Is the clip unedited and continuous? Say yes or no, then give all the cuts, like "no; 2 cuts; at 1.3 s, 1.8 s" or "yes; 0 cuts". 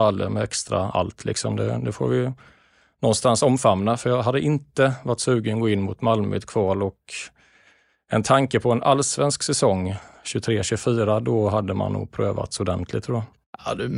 yes; 0 cuts